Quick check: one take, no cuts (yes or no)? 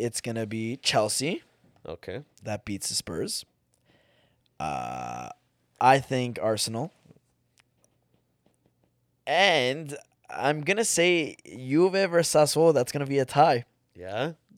yes